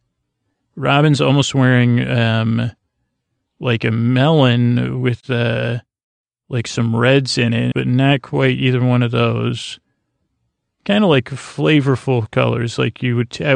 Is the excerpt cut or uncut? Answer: cut